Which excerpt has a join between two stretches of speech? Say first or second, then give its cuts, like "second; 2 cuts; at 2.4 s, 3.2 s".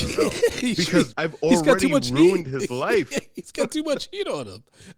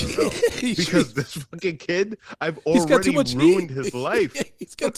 first; 1 cut; at 1.1 s